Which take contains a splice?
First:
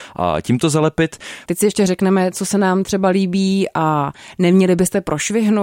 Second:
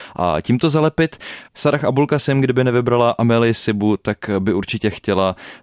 first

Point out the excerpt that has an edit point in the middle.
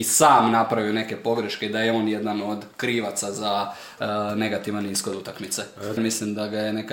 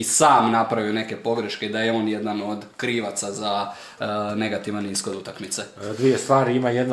first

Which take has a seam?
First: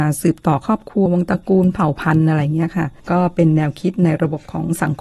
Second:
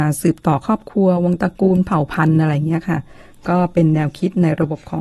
first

